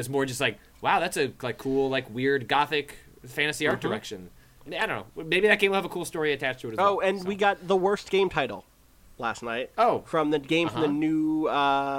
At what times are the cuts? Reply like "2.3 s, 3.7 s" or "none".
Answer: 4.7 s